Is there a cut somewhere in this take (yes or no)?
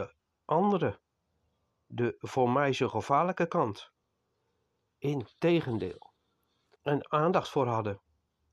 yes